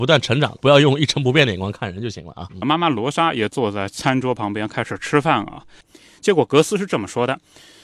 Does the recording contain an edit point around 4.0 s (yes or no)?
no